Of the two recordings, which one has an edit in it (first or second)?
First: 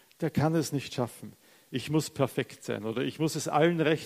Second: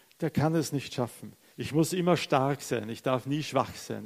second